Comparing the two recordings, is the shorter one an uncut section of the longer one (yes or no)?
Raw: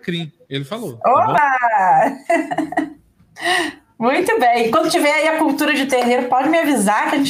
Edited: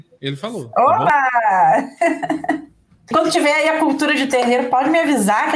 no